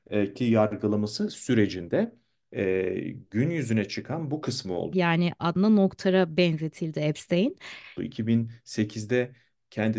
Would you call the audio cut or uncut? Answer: cut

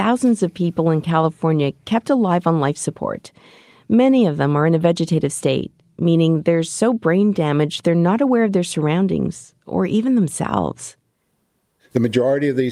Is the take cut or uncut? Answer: uncut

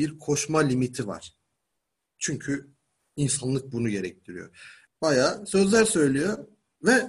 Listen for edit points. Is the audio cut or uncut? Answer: cut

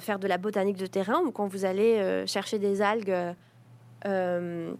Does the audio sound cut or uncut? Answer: uncut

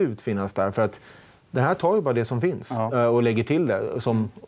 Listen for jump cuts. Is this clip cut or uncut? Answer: uncut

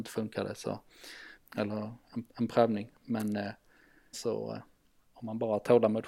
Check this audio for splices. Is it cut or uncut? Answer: cut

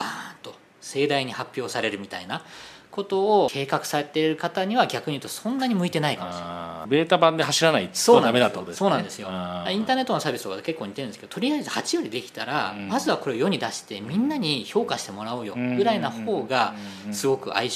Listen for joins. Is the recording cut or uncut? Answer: uncut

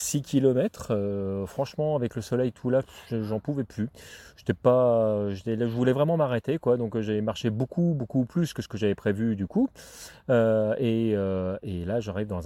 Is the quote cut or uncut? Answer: uncut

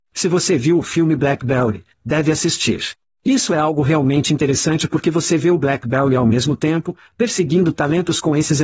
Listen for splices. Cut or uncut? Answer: cut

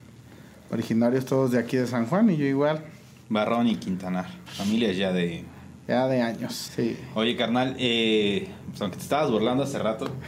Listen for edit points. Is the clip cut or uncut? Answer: cut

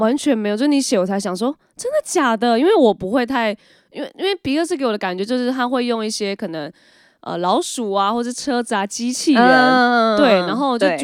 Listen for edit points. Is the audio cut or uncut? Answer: uncut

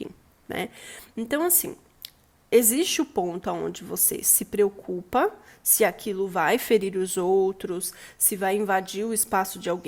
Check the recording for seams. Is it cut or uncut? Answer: uncut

